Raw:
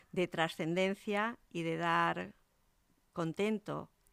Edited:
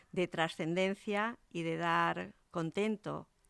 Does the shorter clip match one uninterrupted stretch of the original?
no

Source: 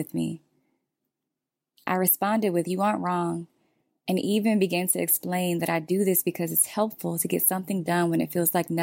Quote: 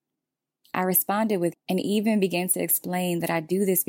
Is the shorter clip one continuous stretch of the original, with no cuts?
no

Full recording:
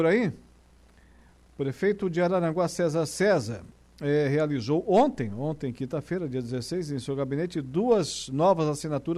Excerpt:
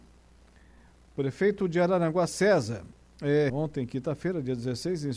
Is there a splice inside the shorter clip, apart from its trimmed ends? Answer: yes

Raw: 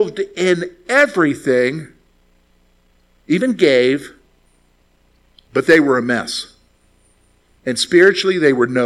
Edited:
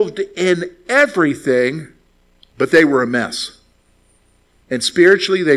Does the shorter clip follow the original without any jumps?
no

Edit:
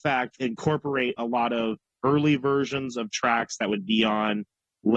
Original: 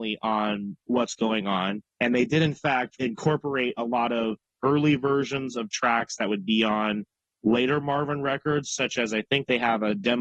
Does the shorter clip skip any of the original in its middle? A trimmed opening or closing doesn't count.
no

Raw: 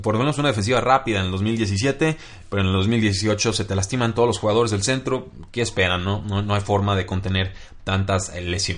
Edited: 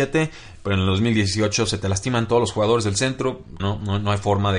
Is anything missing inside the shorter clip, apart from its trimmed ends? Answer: yes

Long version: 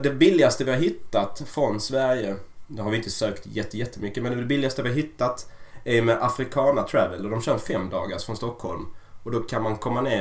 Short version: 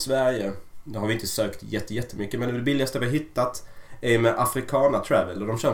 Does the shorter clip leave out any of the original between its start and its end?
no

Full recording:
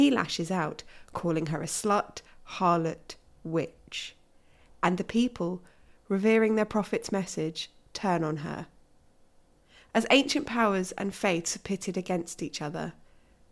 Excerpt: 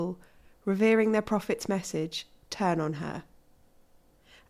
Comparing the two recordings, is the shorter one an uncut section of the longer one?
yes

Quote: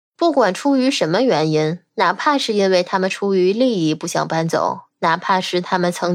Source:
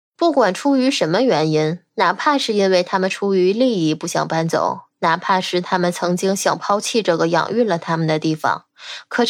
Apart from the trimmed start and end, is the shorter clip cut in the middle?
no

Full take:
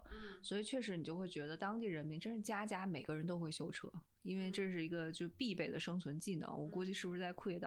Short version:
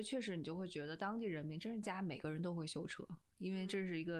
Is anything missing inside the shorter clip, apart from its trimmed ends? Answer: yes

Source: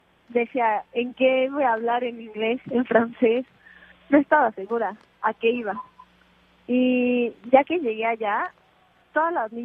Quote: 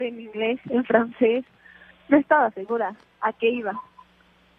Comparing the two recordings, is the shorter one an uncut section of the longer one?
yes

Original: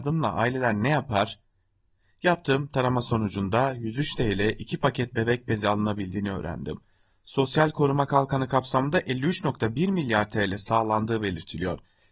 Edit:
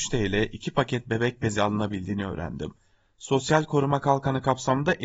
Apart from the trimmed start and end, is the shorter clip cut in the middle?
no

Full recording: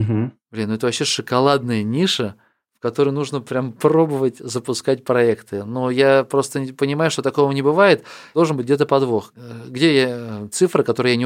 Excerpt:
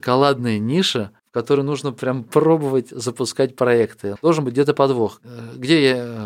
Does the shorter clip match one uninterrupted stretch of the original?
no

